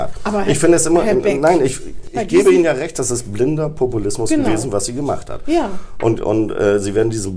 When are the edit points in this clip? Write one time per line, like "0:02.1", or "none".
none

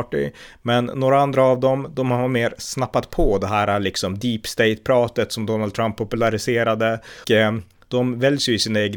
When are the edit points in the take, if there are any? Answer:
0:07.2

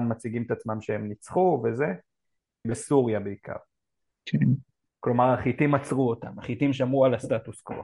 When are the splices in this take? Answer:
0:02.6
0:04.9

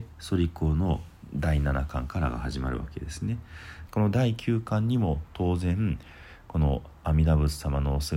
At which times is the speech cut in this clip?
0:03.9

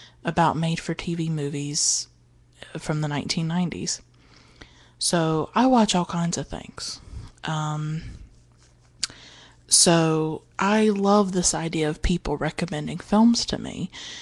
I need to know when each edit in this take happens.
0:10.5

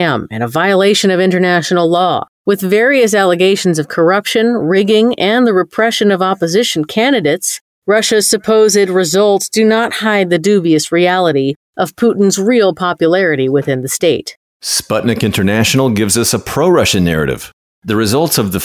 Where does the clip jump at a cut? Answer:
none

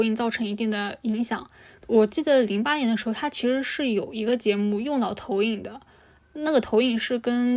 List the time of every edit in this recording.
0:01.8

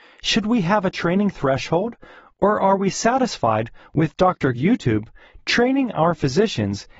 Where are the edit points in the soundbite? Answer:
0:04.5

